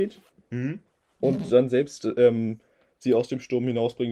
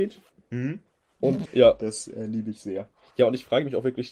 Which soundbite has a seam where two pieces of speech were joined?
second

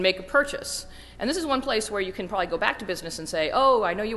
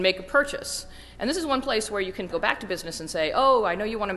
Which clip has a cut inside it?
second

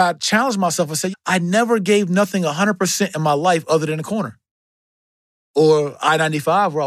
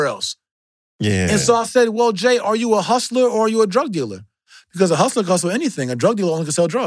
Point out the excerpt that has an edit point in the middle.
first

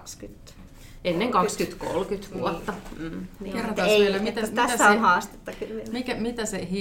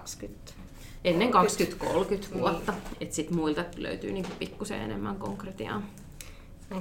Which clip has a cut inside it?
second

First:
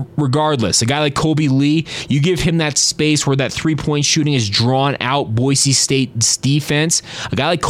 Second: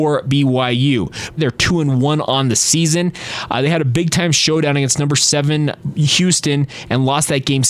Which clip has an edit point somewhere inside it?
second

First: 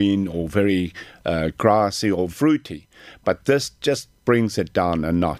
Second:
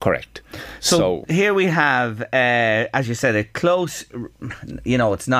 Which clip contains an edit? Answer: first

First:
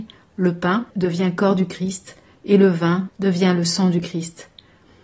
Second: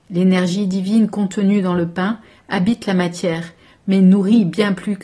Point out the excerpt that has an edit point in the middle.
first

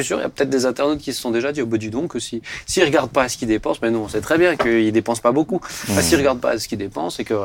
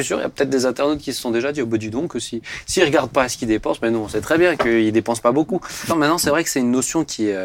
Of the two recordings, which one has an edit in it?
second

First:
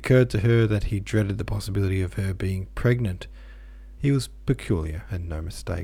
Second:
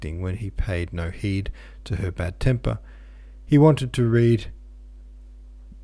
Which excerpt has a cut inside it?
first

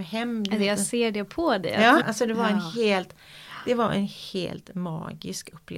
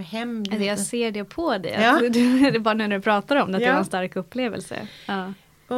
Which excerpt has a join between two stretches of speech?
first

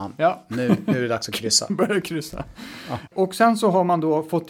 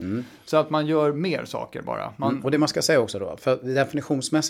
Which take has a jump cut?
first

